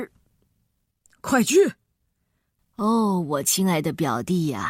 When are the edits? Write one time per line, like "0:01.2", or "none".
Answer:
0:02.6